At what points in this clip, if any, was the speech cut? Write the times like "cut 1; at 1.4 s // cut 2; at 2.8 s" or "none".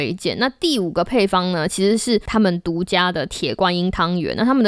none